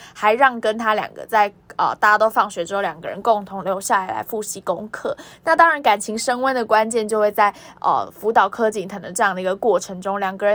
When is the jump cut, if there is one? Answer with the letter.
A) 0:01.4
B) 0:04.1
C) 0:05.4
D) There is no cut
D